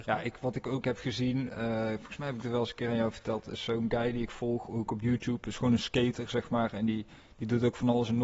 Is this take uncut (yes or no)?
yes